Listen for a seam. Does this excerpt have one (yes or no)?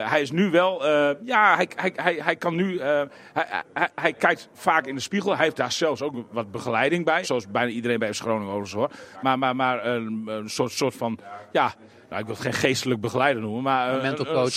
yes